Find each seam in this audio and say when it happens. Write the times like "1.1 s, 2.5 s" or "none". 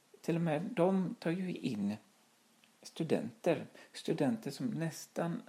none